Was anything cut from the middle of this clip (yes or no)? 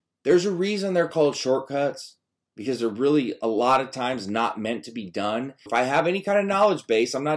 yes